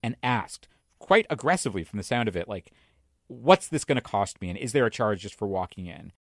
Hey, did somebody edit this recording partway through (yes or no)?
no